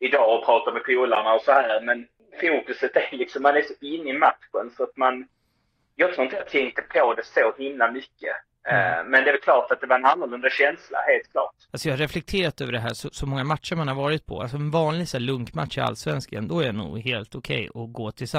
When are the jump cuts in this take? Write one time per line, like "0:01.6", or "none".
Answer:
none